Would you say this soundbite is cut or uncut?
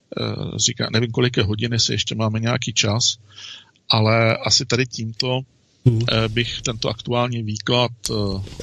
uncut